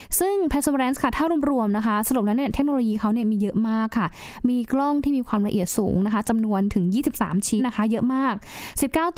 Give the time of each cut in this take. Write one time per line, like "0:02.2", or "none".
0:07.6